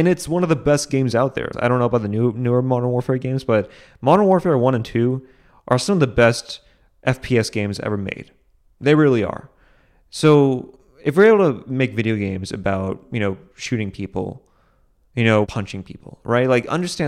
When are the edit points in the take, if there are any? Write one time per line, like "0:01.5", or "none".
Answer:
0:01.5
0:15.4